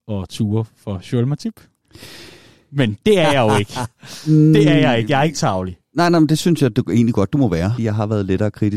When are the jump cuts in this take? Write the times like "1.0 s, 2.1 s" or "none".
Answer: 7.8 s